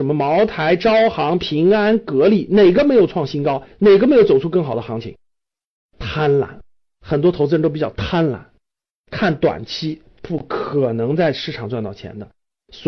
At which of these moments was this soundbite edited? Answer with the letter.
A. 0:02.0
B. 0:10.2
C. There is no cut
B